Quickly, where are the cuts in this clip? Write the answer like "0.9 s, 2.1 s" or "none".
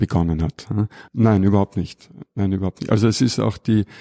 1.1 s